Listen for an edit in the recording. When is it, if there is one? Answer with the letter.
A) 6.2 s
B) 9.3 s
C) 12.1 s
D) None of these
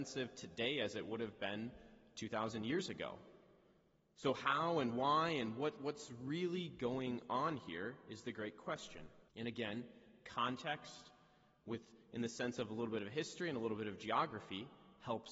B